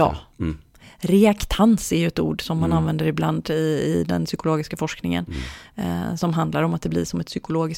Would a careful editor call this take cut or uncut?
uncut